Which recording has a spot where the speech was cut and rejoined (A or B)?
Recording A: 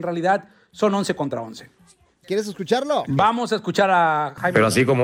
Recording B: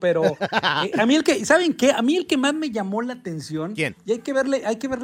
A